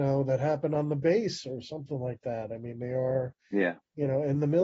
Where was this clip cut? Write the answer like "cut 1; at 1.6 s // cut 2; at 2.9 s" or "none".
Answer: none